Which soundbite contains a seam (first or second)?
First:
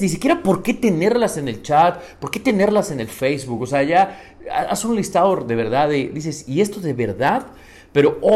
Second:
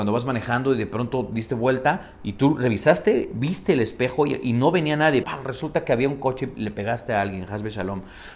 second